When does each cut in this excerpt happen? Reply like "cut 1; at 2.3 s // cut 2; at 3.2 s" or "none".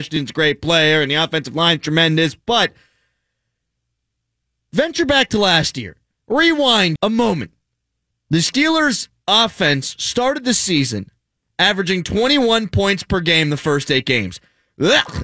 cut 1; at 7.0 s